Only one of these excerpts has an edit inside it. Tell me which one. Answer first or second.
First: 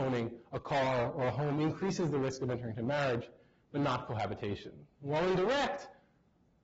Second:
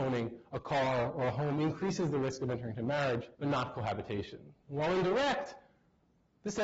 second